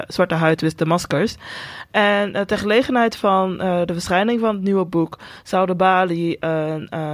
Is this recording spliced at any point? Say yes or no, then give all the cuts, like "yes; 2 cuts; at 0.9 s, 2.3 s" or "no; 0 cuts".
no; 0 cuts